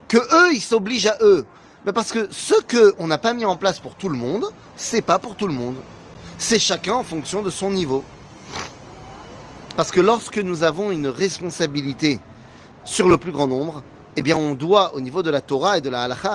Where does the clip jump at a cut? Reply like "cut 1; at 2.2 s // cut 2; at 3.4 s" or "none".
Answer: cut 1; at 9.7 s